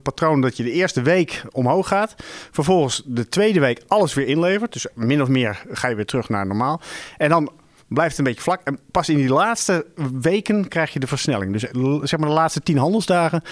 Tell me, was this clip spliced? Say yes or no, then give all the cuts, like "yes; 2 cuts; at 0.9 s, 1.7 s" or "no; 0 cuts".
no; 0 cuts